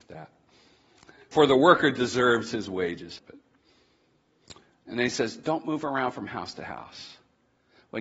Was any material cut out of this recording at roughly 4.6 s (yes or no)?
no